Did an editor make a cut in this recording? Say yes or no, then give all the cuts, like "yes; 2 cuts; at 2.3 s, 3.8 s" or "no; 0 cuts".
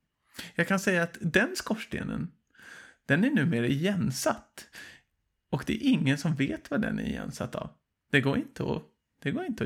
no; 0 cuts